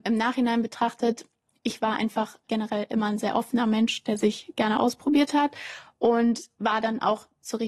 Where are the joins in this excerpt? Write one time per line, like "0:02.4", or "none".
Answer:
0:02.4